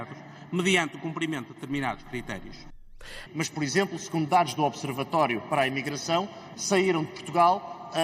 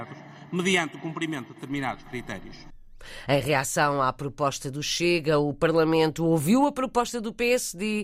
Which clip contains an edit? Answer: first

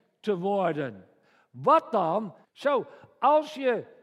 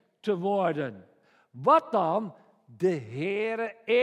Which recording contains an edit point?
first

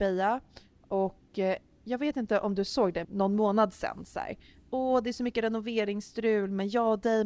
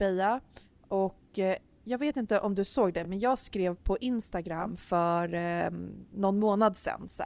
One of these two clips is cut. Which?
first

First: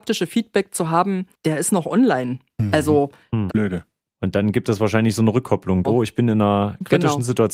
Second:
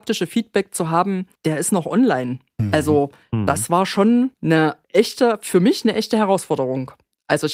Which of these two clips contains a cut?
first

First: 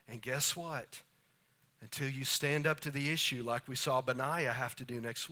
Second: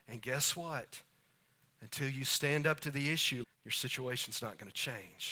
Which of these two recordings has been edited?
second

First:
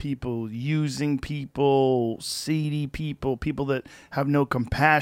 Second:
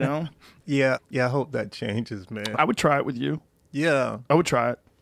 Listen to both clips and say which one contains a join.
second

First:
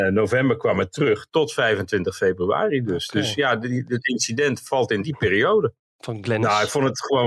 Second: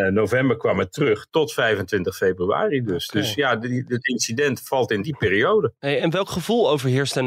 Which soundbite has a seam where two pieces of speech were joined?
first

